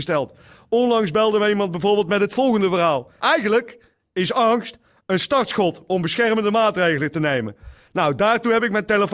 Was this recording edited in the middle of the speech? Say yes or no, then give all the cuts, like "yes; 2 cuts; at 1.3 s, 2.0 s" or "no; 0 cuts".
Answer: yes; 2 cuts; at 3.2 s, 7.9 s